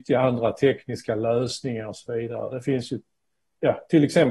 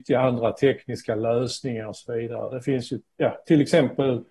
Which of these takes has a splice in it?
second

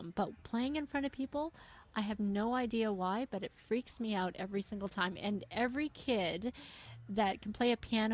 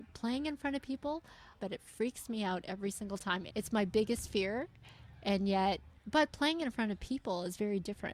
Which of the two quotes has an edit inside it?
second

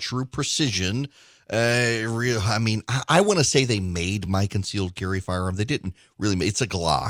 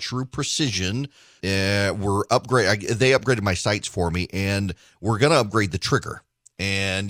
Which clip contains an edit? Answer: second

